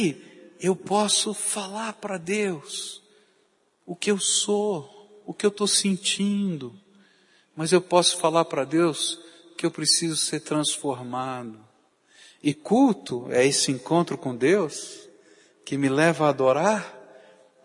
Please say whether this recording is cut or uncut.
uncut